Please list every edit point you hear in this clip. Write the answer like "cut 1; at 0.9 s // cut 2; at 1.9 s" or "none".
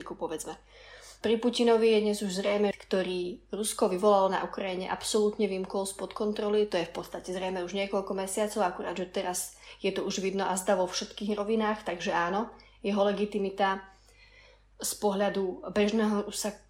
cut 1; at 2.7 s